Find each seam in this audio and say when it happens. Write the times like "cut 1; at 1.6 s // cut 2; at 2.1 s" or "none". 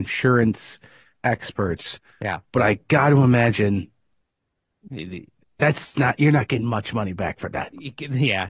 none